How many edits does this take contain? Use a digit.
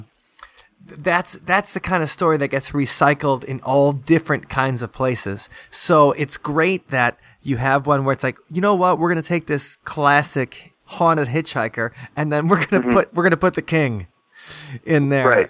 0